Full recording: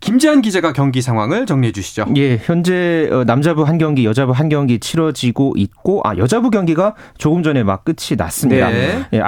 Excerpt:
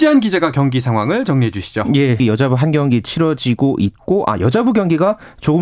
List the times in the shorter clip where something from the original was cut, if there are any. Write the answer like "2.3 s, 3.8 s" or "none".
2.2 s